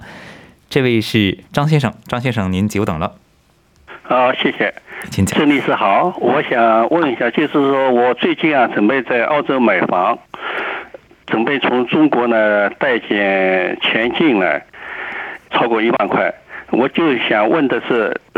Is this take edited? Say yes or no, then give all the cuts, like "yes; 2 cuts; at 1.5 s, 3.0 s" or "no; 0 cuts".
yes; 2 cuts; at 1.5 s, 15.5 s